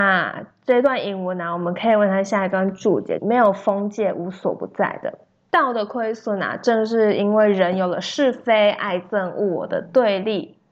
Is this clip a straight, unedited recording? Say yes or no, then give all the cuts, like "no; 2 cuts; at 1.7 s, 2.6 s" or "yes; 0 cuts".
no; 2 cuts; at 3.2 s, 5.5 s